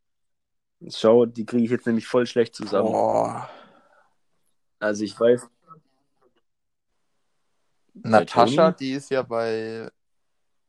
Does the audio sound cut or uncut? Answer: uncut